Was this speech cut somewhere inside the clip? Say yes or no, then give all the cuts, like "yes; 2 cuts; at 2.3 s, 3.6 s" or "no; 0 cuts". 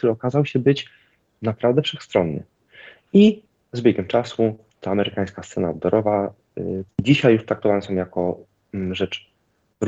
yes; 1 cut; at 6.9 s